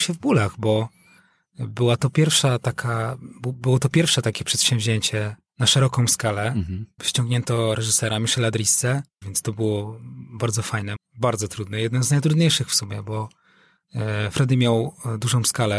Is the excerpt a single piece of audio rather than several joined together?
no; 3 cuts; at 7.0 s, 9.2 s, 11.0 s

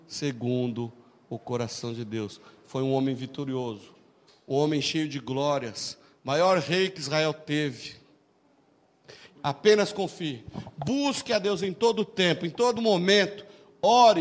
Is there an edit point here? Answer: yes; 1 cut; at 9.3 s

